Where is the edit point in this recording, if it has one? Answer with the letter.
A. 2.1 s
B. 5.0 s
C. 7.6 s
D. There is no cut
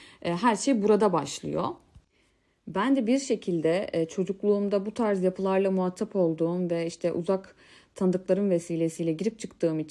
D